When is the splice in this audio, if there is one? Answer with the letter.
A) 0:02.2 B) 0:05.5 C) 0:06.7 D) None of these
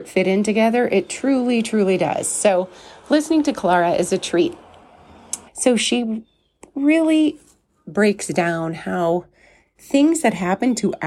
B